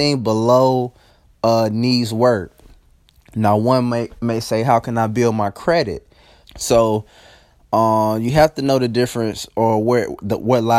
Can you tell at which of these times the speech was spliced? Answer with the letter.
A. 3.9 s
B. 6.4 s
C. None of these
B